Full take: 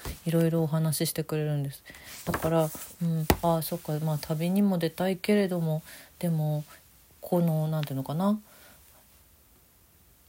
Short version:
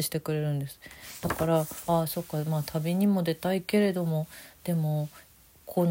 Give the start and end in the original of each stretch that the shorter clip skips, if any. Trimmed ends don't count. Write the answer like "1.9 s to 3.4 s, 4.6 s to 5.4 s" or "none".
2.9 s to 3.4 s